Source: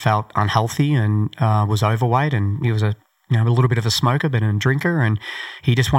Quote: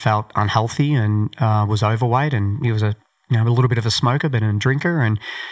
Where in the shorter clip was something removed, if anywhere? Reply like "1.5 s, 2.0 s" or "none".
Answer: none